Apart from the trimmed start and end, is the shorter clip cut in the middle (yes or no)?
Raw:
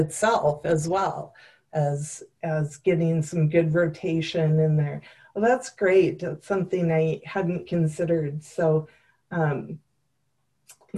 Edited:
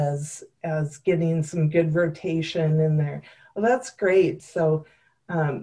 yes